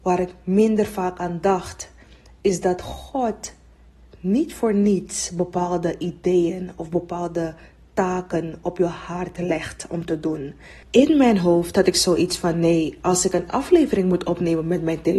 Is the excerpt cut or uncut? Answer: cut